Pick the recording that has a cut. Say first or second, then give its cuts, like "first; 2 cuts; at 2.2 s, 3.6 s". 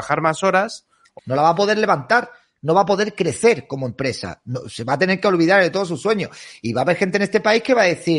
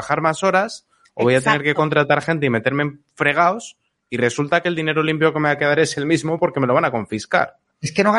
first; 1 cut; at 1.2 s